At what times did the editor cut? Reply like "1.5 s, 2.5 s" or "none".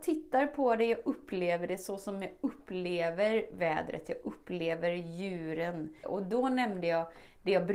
6.0 s